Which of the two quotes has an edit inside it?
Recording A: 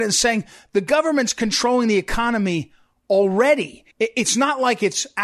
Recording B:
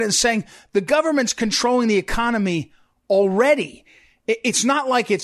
A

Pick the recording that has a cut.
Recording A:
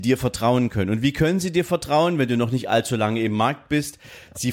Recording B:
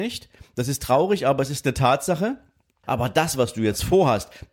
B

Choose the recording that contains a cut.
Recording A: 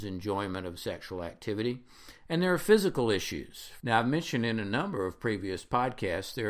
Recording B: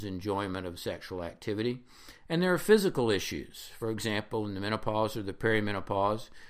A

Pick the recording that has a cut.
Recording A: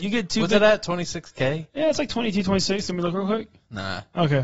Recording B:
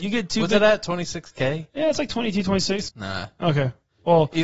B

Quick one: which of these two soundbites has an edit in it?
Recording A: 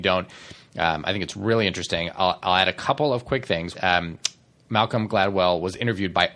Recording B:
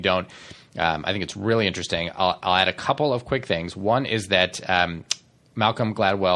A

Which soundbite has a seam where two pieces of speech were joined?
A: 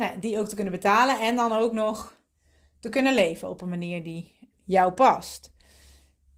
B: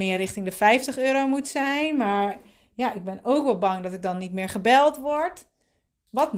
A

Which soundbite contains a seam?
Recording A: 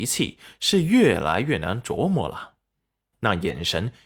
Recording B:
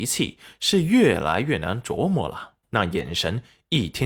B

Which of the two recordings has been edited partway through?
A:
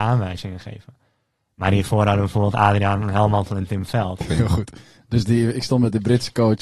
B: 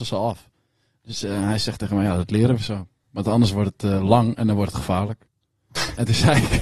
A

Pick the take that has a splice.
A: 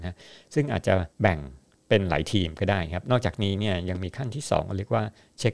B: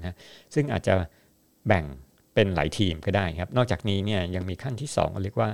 A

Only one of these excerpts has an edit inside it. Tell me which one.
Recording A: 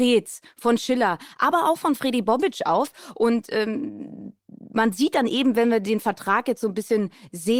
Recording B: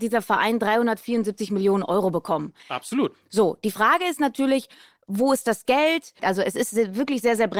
B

